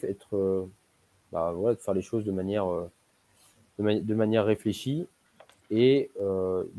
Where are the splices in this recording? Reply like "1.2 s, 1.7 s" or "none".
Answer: none